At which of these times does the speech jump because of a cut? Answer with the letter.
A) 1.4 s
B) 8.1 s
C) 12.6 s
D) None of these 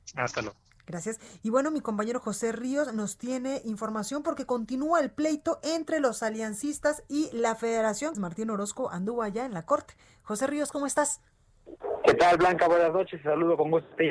B